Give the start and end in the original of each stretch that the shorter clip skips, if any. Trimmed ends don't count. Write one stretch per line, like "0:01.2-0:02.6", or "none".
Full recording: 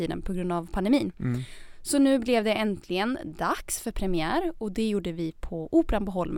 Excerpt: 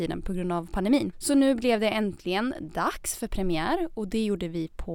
0:01.1-0:01.8